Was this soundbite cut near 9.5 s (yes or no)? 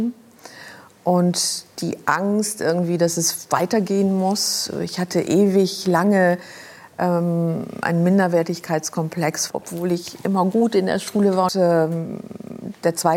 yes